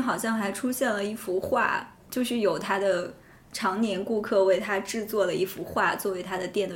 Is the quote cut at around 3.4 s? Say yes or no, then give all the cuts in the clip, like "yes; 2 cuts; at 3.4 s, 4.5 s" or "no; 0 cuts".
no; 0 cuts